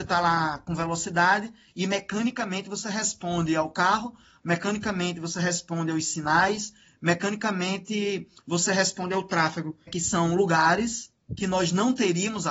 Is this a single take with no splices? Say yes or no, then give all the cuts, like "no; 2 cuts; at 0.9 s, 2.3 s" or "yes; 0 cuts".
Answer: no; 1 cut; at 9.9 s